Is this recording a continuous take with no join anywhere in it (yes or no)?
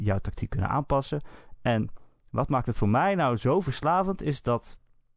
yes